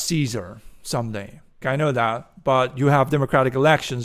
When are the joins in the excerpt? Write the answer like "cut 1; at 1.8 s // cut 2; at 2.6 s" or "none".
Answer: cut 1; at 1.6 s